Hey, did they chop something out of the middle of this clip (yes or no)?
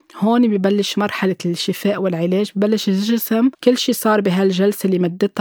yes